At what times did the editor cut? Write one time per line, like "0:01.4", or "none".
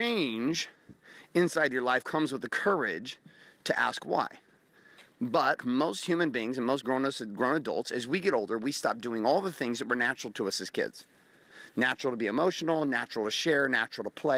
0:05.6